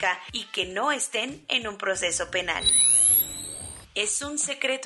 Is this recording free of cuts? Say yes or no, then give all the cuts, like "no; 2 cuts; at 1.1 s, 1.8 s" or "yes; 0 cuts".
yes; 0 cuts